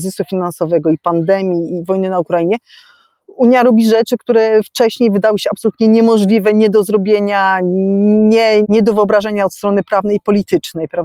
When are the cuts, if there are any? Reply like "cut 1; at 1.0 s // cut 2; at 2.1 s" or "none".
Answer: cut 1; at 8.6 s